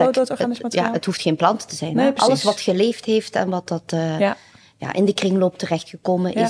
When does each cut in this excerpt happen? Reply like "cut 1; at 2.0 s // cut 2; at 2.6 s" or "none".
none